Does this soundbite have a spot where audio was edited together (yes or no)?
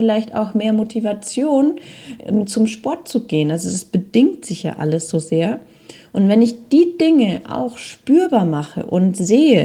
no